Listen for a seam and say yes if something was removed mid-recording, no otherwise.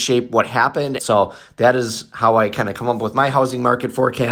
yes